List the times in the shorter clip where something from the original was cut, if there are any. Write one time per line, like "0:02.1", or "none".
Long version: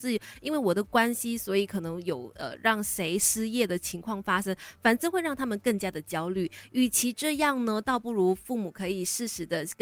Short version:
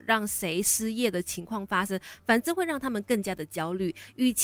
none